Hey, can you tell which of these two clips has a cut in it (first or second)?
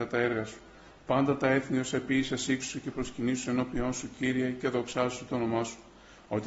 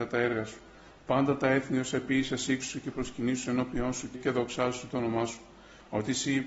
second